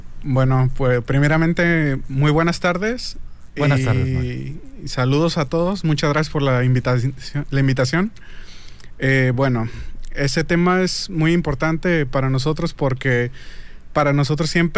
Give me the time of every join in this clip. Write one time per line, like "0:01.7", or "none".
none

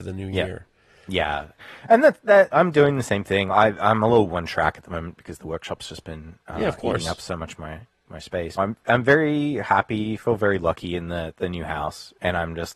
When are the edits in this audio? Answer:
0:08.6

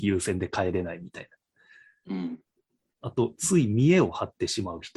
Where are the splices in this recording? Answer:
none

